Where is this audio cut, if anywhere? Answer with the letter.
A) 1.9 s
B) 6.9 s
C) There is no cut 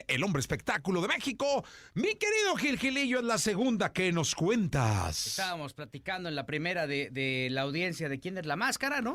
C